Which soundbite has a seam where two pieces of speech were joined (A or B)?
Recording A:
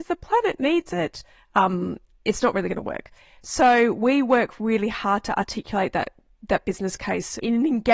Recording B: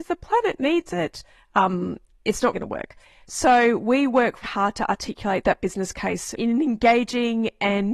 B